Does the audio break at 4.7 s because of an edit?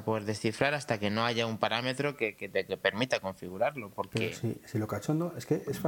no; 0 cuts

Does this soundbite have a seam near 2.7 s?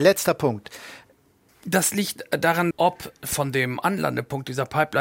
yes; 2 cuts; at 1.5 s, 2.7 s

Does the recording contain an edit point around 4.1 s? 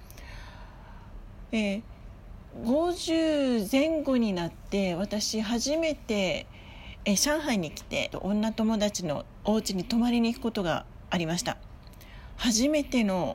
no; 1 cut; at 8.1 s

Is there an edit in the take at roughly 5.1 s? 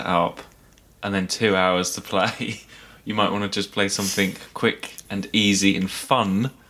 yes; 1 cut; at 5.1 s

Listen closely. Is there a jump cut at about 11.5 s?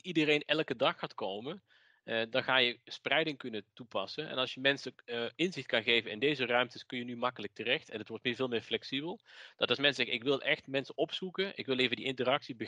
no; 1 cut; at 3.7 s

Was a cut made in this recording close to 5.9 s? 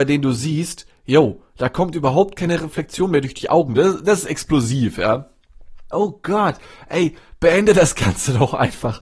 yes; 2 cuts; at 3.8 s, 5.9 s

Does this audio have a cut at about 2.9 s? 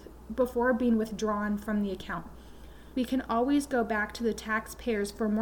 yes; 1 cut; at 2.9 s

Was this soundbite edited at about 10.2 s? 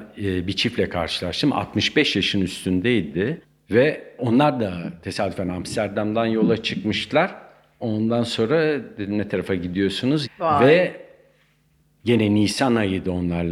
yes; 1 cut; at 10.2 s

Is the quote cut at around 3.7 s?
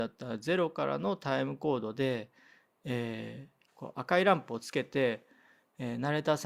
yes; 1 cut; at 3.7 s

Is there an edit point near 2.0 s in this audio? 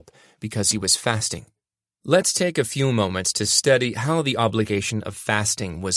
yes; 1 cut; at 2.0 s

